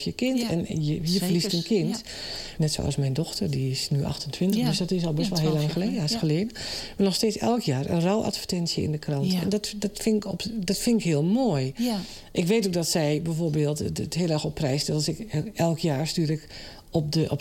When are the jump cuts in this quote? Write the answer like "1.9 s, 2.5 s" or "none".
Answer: 2.6 s